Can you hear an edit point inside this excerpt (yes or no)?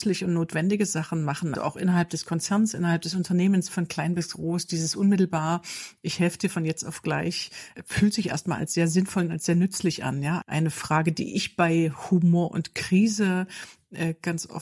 yes